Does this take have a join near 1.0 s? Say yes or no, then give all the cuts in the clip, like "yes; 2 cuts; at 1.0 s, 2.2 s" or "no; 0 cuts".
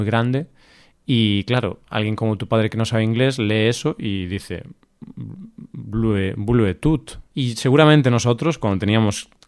no; 1 cut; at 7.3 s